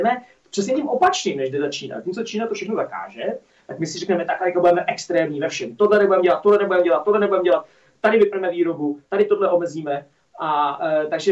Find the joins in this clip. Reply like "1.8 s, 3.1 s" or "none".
none